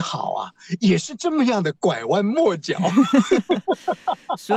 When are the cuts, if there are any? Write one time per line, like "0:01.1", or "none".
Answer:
none

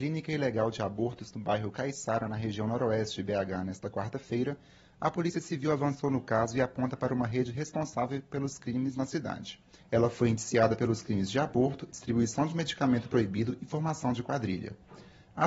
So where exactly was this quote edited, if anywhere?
0:09.8
0:11.9

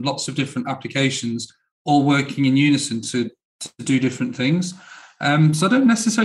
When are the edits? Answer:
none

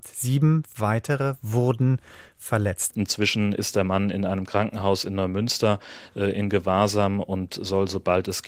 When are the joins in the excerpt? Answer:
0:02.9

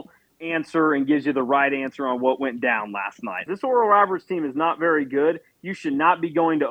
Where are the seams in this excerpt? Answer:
0:03.5

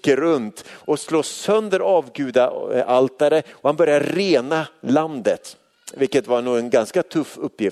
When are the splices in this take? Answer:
none

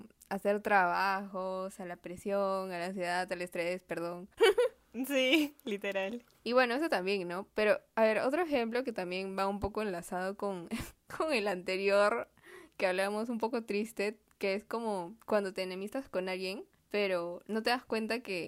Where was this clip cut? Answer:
0:04.4

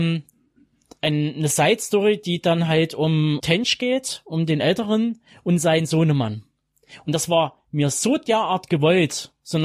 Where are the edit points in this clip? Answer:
none

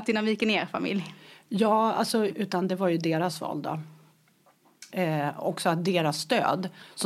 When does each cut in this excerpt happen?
0:02.3
0:04.9

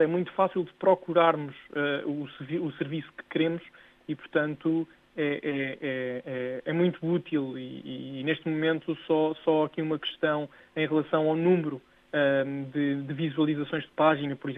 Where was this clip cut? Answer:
none

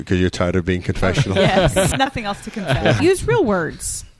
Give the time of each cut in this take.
0:01.9
0:03.0

